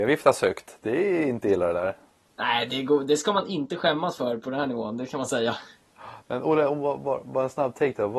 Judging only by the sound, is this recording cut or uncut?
uncut